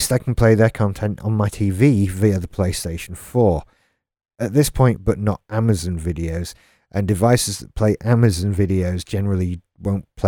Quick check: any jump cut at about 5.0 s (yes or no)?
yes